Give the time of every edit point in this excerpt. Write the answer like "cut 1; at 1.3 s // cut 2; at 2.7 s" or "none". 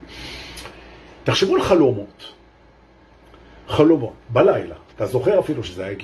cut 1; at 4.9 s